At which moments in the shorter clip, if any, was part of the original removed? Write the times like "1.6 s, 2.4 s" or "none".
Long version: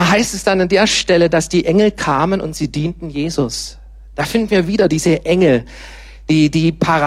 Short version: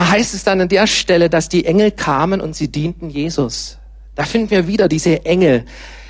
none